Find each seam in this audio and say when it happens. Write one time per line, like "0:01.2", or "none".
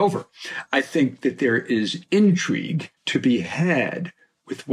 0:03.0